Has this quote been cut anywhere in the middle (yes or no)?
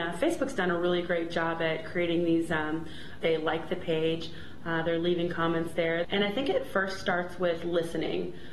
yes